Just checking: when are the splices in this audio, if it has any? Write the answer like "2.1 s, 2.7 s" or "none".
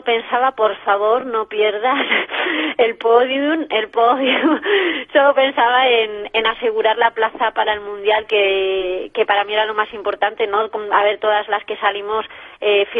none